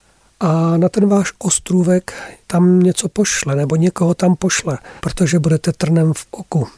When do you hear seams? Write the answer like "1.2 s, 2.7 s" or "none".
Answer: 2.4 s, 5.0 s